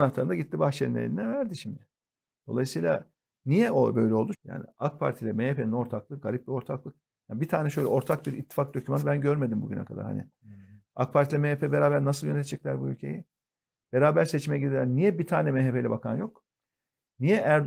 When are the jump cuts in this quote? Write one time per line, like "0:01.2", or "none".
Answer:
0:04.3